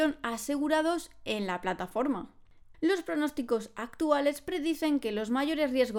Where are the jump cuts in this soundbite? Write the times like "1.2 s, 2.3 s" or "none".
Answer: 2.7 s